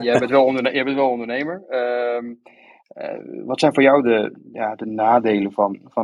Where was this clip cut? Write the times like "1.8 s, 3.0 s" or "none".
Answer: none